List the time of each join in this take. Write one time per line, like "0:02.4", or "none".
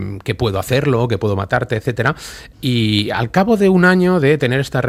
0:02.5